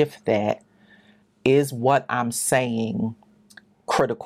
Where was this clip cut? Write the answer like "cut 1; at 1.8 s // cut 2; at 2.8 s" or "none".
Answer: cut 1; at 1.2 s